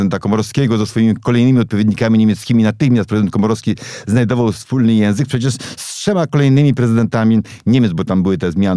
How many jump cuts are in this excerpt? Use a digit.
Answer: 0